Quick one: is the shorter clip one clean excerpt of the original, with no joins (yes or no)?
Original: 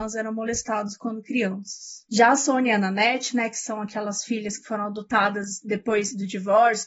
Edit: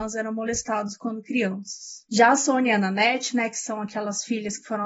yes